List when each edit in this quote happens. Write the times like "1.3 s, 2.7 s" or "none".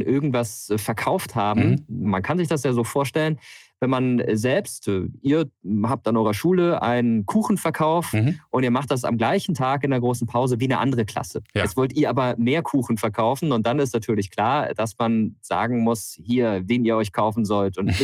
2.0 s, 16.7 s